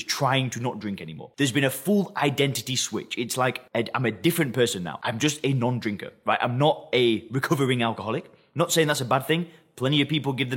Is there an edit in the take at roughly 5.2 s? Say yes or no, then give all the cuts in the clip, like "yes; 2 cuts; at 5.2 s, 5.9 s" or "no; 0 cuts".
no; 0 cuts